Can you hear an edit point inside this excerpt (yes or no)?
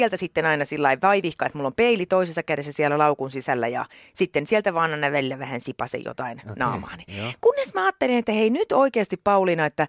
no